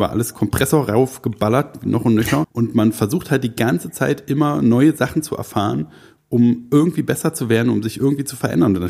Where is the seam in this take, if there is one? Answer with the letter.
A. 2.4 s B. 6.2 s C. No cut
A